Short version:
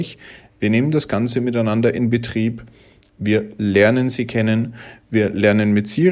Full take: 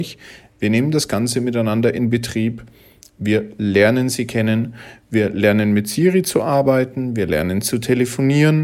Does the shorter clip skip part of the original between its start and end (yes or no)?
no